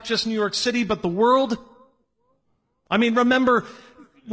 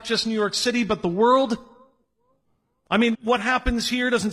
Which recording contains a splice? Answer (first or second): second